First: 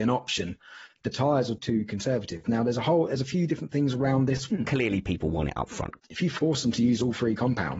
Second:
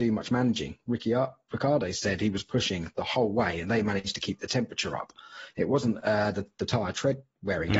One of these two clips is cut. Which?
first; 3 cuts; at 1.6 s, 4.5 s, 6.0 s

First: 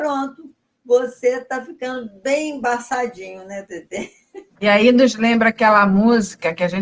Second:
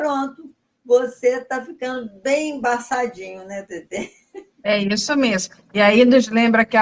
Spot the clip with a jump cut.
first; 1 cut; at 4.5 s

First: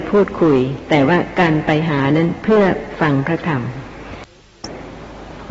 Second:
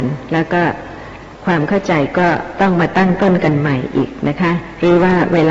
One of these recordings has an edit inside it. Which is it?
second; 1 cut; at 1.3 s

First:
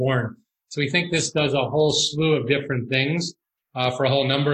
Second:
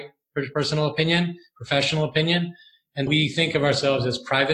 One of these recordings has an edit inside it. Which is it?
second; 1 cut; at 3.1 s

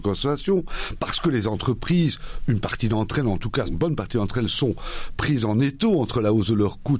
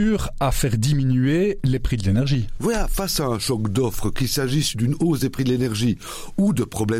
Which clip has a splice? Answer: first; 1 cut; at 3.6 s

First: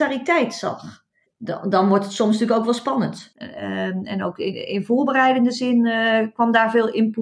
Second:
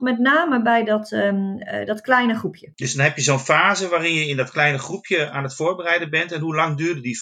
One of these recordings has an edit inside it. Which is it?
first; 2 cuts; at 1.2 s, 3.3 s

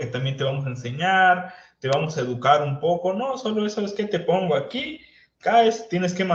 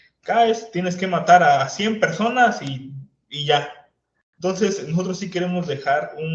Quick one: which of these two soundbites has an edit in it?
second; 1 cut; at 4.1 s

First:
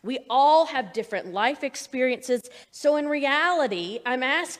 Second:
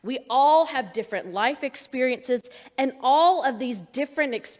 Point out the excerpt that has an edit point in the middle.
first; 1 cut; at 2.6 s

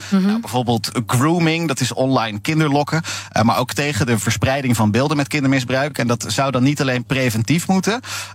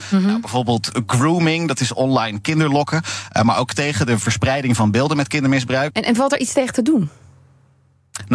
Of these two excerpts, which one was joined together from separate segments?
second; 1 cut; at 5.9 s

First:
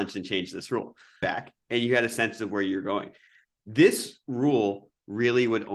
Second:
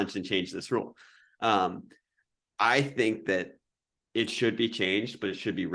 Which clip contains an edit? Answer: first; 1 cut; at 1.2 s

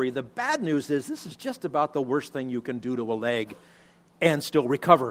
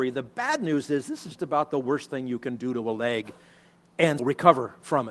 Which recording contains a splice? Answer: second; 2 cuts; at 1.4 s, 4.2 s

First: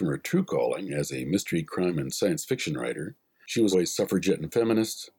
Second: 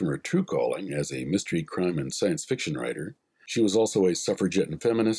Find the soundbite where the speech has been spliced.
first; 1 cut; at 3.7 s

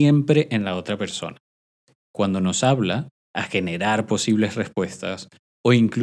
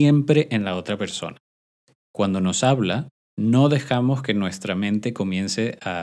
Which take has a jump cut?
first; 1 cut; at 3.2 s

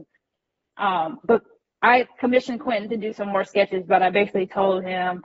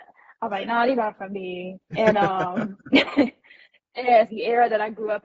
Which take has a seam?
second; 2 cuts; at 1.9 s, 4.3 s

